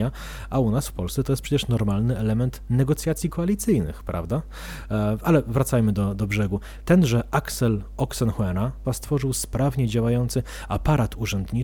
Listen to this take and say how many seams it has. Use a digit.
2